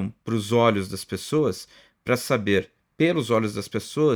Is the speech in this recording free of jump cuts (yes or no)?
yes